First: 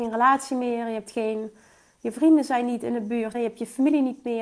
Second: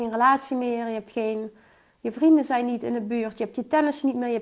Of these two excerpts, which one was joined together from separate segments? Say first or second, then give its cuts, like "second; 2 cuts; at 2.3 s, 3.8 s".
first; 1 cut; at 3.3 s